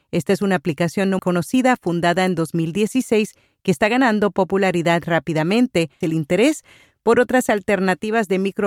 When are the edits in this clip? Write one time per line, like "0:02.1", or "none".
0:01.2
0:06.0

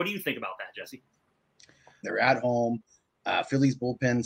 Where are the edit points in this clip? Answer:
0:02.0

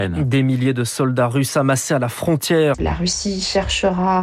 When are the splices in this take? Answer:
0:02.7

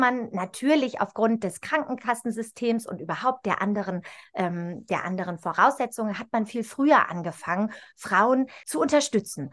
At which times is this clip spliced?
0:08.6

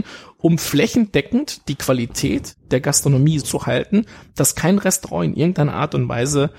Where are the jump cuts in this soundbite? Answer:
0:03.4

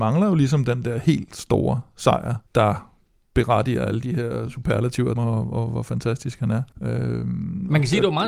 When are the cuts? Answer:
0:02.5
0:05.2
0:06.7

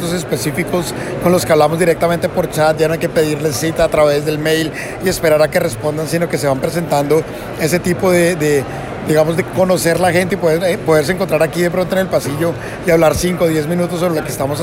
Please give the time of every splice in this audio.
none

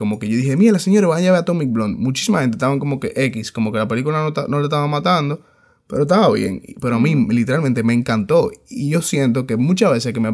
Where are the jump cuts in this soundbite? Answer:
none

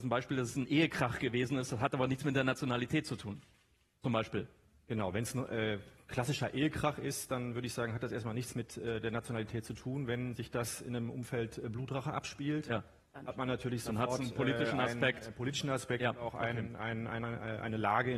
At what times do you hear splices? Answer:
none

